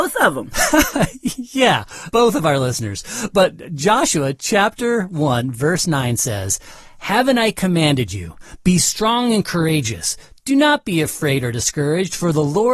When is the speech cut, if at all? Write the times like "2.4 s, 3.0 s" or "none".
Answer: 2.1 s